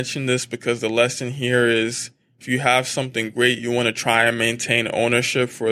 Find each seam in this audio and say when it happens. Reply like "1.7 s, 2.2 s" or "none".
none